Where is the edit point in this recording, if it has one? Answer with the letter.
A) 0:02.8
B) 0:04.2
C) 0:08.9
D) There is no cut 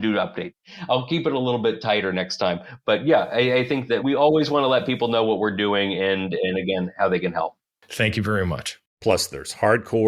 C